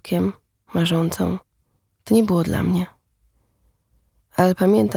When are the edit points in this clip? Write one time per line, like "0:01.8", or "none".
0:01.9